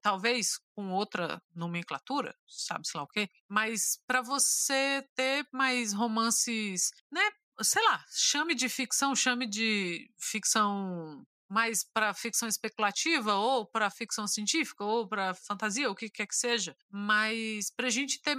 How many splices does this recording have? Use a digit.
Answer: 0